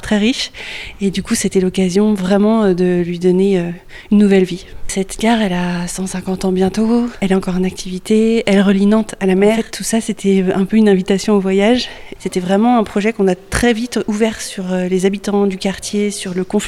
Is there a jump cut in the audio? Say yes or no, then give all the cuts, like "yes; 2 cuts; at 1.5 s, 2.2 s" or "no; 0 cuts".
yes; 1 cut; at 12.2 s